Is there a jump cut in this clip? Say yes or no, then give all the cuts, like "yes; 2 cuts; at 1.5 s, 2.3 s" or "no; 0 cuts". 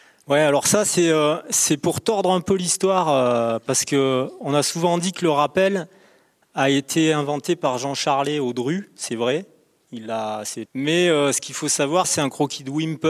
yes; 2 cuts; at 10.7 s, 12.0 s